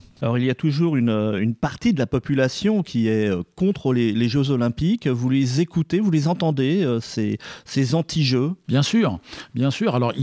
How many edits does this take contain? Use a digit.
0